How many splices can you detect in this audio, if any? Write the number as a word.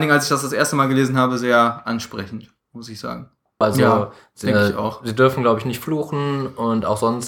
one